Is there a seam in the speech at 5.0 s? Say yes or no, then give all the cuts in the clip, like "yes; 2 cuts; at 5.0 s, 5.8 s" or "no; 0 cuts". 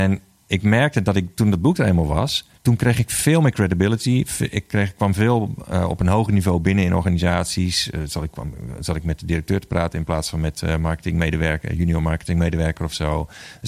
no; 1 cut; at 2.6 s